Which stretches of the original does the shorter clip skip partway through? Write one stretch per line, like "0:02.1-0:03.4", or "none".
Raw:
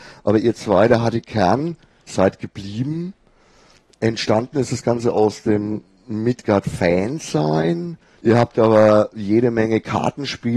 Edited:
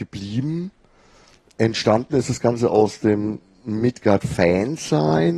none